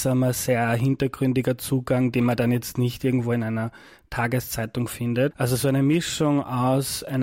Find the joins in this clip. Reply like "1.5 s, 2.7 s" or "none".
5.3 s